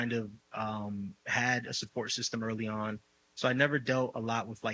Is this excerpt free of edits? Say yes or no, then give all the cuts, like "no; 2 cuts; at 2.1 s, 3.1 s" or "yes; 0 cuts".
yes; 0 cuts